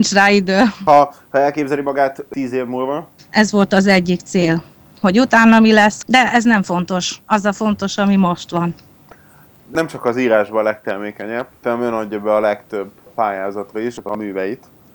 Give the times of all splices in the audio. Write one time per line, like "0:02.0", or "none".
0:03.2